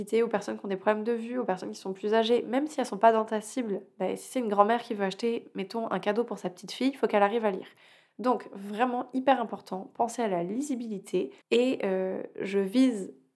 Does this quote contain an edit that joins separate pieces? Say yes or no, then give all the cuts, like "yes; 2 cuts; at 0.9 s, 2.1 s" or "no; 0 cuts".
yes; 1 cut; at 11.4 s